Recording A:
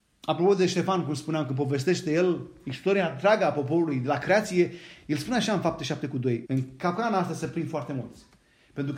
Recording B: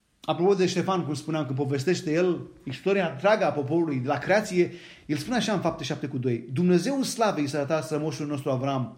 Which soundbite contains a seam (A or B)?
A